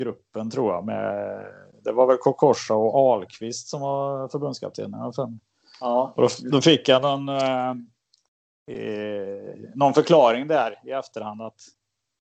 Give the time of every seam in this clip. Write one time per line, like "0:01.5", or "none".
none